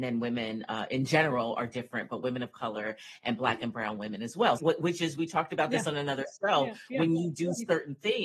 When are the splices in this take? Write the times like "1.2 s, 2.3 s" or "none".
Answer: 4.6 s